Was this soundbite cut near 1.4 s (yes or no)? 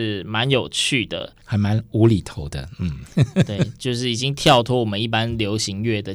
yes